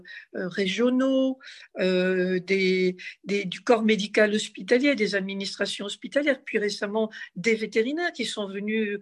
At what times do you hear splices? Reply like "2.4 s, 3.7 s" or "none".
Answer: none

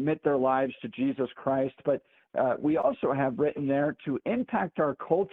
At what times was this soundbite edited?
none

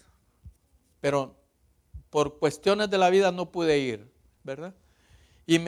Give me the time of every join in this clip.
4.4 s

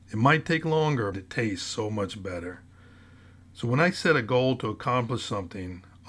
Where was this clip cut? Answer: 1.1 s

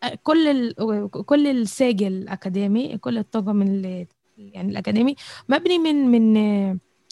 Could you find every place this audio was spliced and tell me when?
none

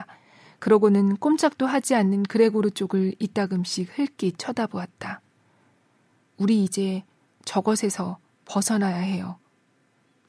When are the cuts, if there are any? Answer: none

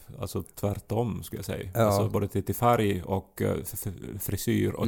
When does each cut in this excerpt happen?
none

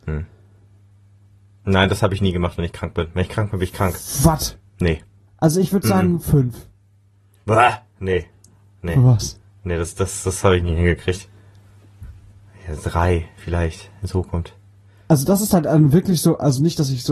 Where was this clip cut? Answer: none

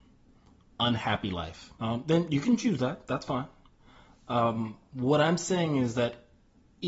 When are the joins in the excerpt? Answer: 1.8 s

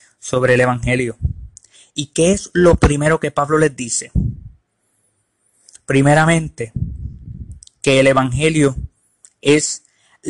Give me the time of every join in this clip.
none

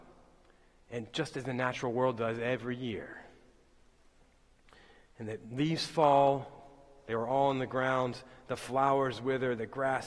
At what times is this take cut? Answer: none

